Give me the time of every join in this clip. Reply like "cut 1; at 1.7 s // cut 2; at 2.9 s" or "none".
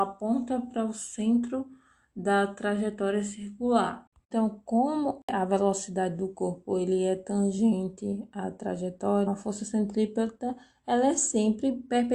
cut 1; at 9.3 s